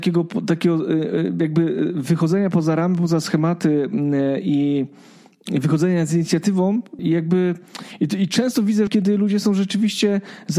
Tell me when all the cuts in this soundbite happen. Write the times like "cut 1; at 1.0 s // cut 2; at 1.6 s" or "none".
cut 1; at 7.0 s // cut 2; at 8.9 s